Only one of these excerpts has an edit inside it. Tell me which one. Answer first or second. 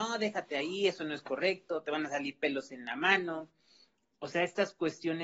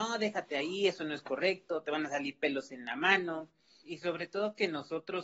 second